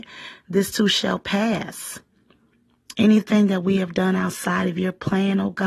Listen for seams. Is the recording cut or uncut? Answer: cut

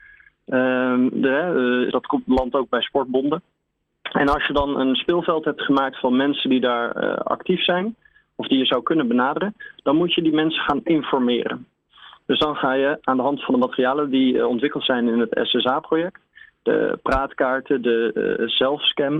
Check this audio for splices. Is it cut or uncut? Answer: cut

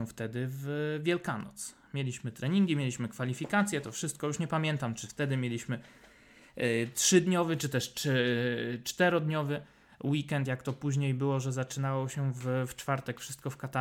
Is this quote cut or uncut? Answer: uncut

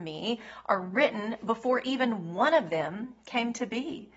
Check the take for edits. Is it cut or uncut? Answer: uncut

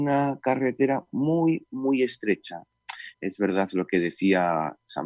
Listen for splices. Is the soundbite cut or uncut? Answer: cut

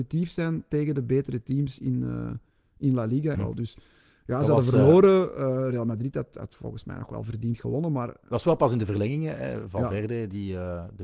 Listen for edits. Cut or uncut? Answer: cut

